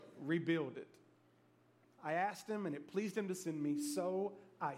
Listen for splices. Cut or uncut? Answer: cut